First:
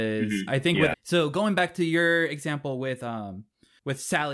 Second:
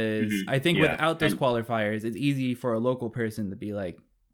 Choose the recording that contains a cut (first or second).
first